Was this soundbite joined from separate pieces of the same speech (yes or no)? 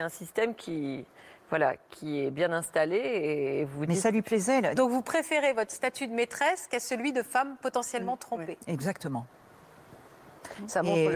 yes